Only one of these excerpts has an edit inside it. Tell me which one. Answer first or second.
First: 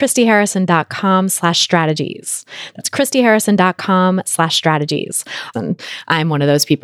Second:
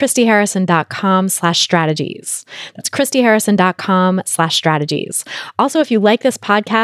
first